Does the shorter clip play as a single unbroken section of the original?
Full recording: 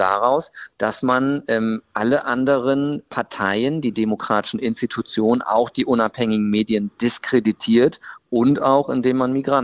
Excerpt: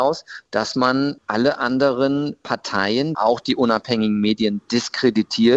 no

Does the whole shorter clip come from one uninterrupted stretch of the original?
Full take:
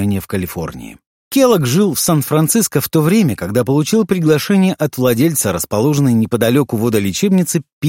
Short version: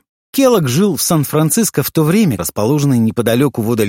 no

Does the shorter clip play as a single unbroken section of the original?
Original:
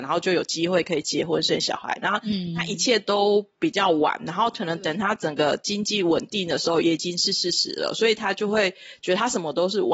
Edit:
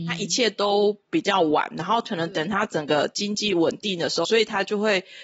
no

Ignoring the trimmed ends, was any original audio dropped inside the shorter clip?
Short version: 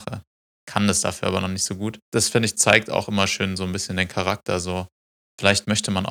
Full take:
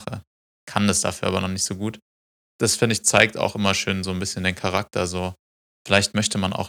yes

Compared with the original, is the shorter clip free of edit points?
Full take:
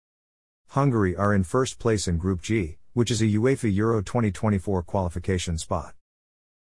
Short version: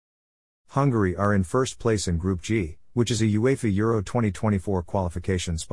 yes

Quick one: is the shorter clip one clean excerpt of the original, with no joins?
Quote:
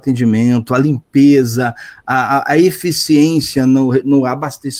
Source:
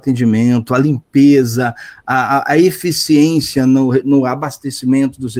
yes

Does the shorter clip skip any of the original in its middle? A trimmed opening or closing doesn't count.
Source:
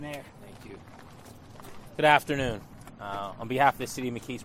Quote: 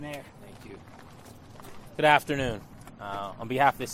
no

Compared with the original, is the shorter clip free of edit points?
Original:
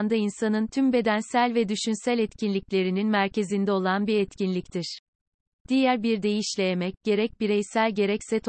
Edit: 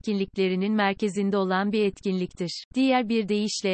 no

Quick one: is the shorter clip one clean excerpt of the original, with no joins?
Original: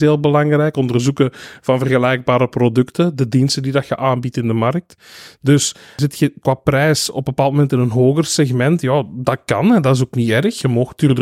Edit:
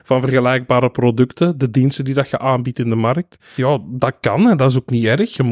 no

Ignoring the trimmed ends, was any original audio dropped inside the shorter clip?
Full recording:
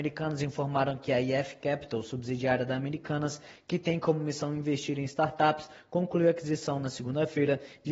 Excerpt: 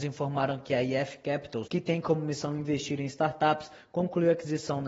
yes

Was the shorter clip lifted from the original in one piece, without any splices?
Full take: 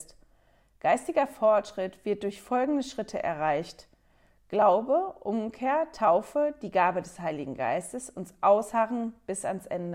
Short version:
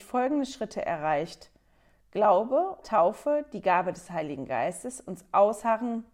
no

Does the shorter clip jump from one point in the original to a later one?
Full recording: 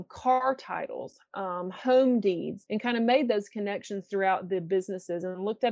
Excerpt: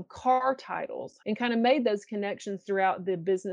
yes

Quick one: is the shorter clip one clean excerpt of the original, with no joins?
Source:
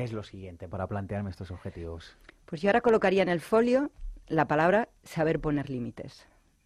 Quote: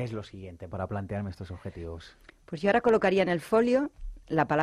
yes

